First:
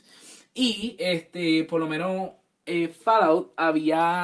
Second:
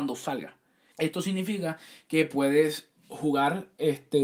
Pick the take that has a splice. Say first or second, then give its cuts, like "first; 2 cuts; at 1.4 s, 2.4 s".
second; 1 cut; at 0.9 s